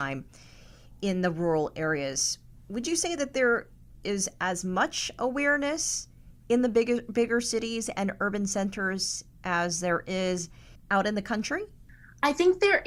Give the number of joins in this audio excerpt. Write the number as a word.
zero